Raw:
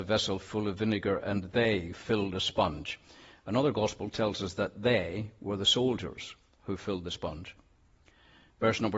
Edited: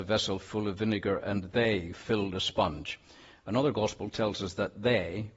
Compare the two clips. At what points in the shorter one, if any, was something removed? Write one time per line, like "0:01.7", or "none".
none